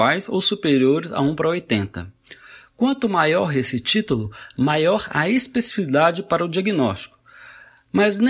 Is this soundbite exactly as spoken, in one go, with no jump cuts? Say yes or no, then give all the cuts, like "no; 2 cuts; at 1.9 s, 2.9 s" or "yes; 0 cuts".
yes; 0 cuts